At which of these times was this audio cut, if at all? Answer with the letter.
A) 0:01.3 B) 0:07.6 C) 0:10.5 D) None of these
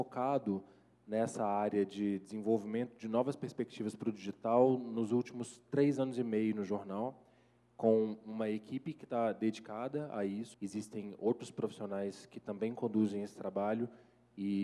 C